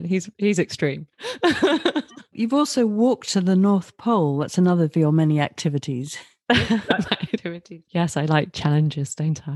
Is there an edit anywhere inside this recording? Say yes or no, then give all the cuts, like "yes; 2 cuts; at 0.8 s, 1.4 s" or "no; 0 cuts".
no; 0 cuts